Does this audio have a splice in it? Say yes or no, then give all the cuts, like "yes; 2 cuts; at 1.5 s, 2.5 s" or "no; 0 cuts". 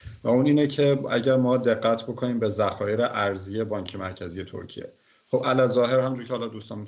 no; 0 cuts